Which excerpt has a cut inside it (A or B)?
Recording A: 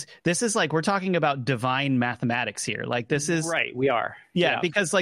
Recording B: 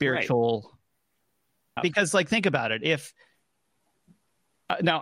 B